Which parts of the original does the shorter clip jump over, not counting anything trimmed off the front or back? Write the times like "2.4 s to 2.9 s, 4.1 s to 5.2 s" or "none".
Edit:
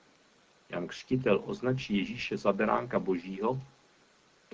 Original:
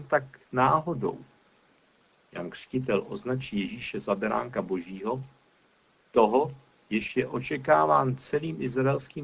none